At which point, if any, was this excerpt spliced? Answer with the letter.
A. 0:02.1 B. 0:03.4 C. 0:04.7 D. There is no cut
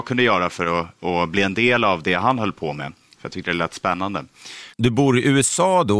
C